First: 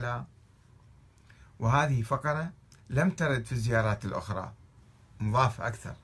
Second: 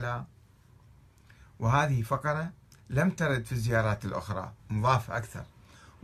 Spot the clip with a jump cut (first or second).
second